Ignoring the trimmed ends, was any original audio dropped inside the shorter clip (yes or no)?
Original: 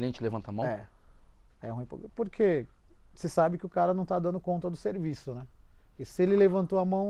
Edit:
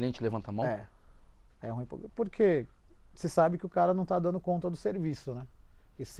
no